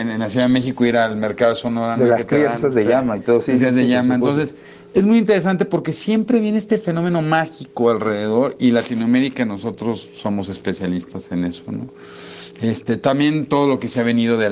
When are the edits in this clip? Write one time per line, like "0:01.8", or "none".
none